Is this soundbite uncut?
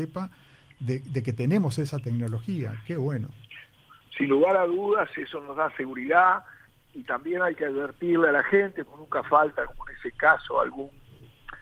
yes; 0 cuts

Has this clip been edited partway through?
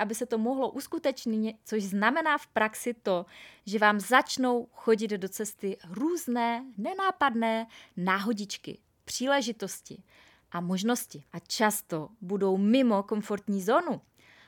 yes; 2 cuts; at 1.6 s, 11.3 s

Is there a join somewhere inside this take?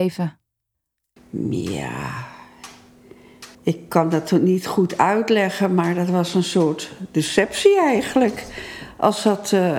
yes; 2 cuts; at 1.2 s, 3.5 s

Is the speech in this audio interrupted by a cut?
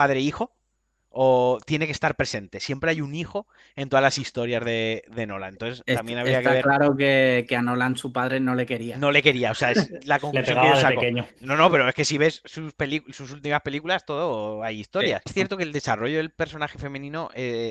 yes; 1 cut; at 15.3 s

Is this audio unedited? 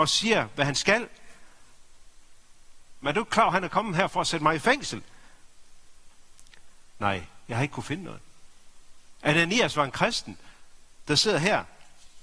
no; 3 cuts; at 3.0 s, 6.9 s, 11.0 s

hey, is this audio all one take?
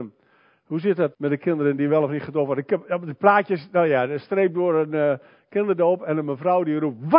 no; 1 cut; at 1.1 s

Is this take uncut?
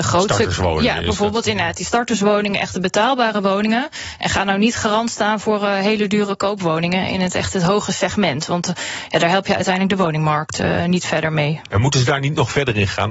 yes; 0 cuts

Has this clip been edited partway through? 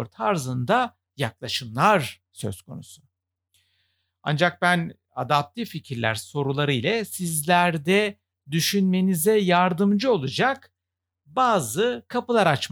yes; 1 cut; at 4.1 s

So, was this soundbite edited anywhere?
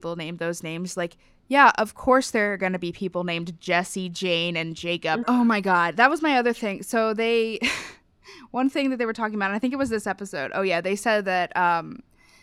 yes; 1 cut; at 5.2 s

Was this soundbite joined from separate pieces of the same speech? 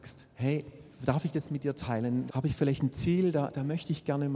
yes; 1 cut; at 2.3 s

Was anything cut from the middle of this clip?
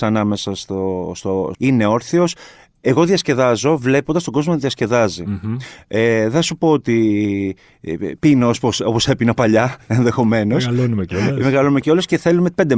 yes; 1 cut; at 1.5 s

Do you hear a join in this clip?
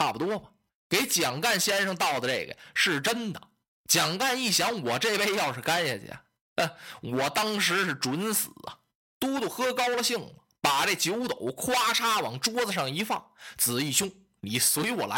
no; 0 cuts

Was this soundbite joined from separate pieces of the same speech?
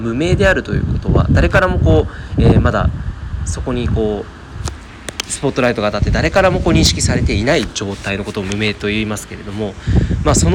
no; 0 cuts

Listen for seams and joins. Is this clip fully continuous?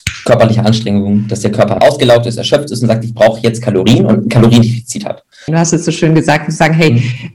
no; 2 cuts; at 1.8 s, 5.5 s

